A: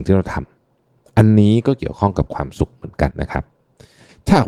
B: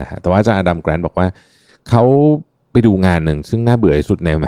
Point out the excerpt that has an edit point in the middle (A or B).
A